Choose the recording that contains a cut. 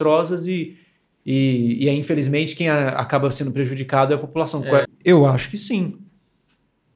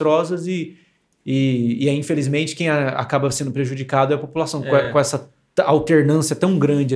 first; 1 cut; at 4.8 s

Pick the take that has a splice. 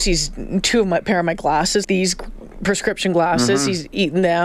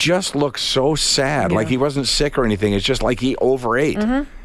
first; 1 cut; at 1.8 s

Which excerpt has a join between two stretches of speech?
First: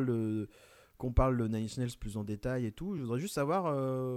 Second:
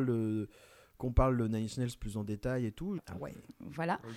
second; 1 cut; at 3.0 s

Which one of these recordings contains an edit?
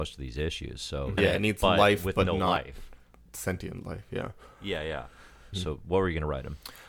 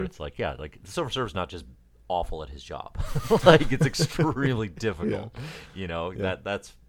first; 2 cuts; at 1.2 s, 5.5 s

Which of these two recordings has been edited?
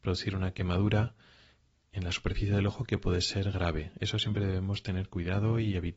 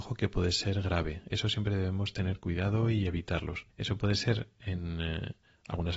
second; 1 cut; at 3.7 s

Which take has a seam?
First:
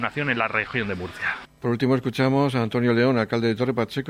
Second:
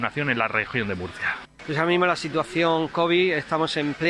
second; 1 cut; at 1.5 s

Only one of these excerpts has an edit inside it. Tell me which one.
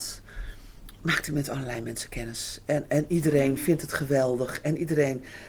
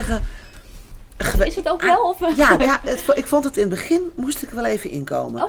second; 1 cut; at 2.6 s

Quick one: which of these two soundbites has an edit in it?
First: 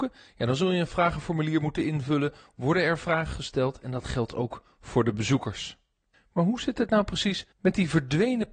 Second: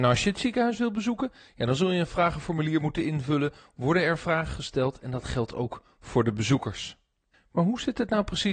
first; 1 cut; at 7.5 s

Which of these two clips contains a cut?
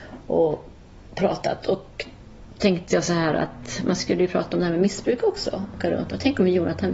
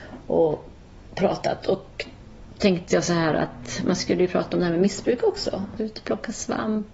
second; 1 cut; at 5.8 s

